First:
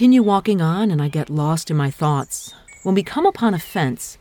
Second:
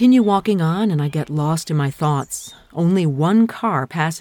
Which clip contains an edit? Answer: first; 1 cut; at 2.7 s

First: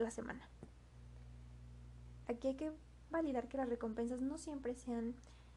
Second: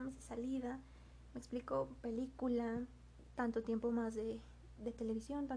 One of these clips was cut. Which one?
first; 1 cut; at 2.2 s

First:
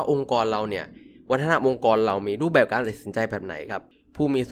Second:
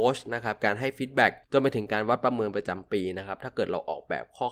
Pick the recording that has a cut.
second; 1 cut; at 1.4 s

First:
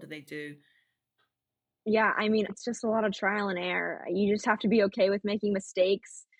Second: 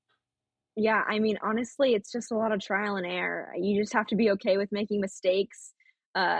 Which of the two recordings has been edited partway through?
first; 1 cut; at 2.5 s

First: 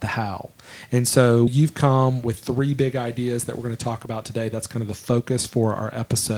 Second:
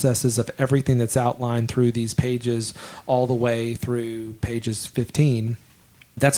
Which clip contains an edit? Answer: first; 1 cut; at 1.5 s

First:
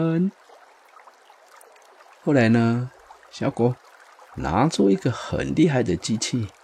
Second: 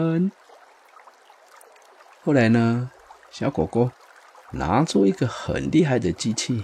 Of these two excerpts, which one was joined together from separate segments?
first; 1 cut; at 3.5 s

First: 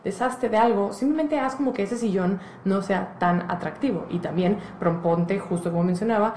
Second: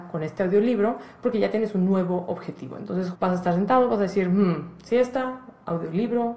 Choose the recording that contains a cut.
second; 1 cut; at 3.1 s

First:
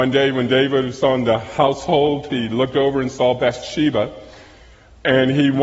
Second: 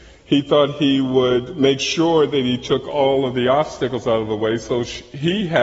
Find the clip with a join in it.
first; 1 cut; at 2.3 s

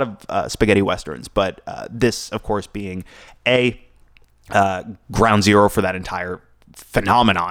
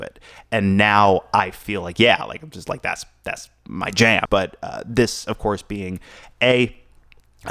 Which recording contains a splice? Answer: second; 1 cut; at 4.3 s

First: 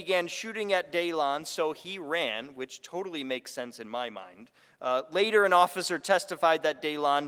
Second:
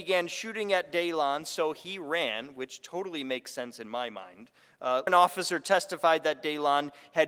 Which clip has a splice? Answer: second; 1 cut; at 5.1 s

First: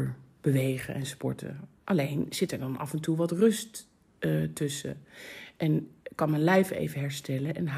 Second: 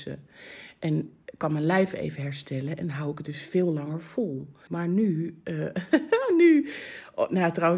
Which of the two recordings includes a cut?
second; 1 cut; at 4.7 s

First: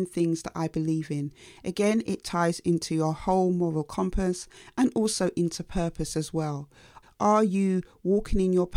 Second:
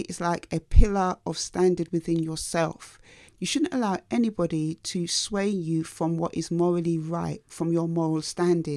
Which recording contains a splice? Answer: first; 1 cut; at 7.0 s

